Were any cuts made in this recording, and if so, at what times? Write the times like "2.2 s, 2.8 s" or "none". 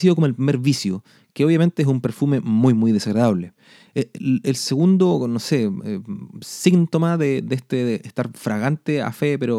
none